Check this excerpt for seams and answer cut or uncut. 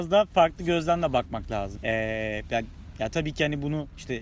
cut